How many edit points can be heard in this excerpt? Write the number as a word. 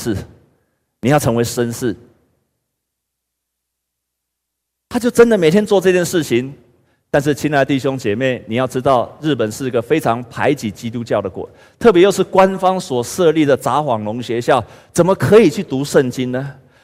zero